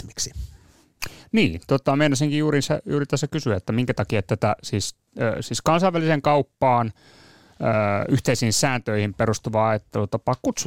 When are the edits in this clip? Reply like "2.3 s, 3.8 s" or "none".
none